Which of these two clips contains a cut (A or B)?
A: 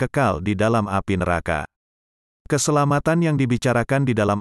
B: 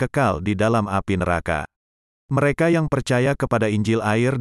B